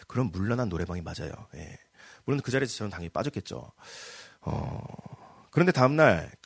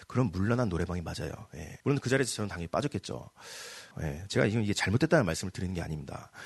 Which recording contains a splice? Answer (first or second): second